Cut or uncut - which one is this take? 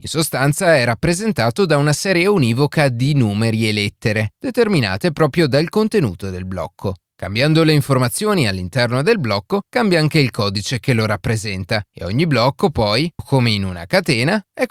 cut